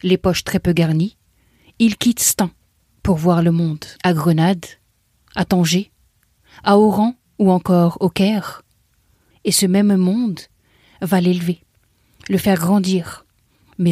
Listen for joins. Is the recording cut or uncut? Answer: cut